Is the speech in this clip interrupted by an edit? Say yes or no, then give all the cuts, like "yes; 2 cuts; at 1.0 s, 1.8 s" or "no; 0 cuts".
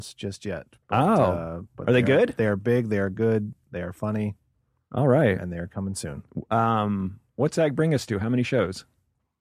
no; 0 cuts